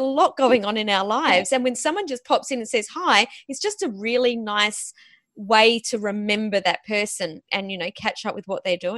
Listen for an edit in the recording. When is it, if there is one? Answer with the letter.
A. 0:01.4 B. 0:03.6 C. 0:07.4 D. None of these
C